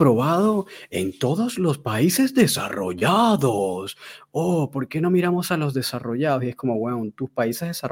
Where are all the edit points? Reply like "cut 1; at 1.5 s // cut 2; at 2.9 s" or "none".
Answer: none